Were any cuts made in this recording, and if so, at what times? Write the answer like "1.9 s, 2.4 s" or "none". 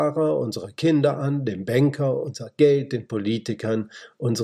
none